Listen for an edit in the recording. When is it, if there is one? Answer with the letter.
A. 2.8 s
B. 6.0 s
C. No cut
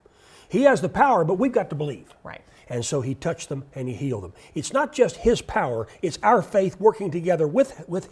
C